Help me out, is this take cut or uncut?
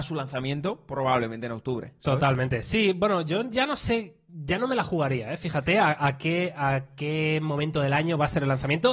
uncut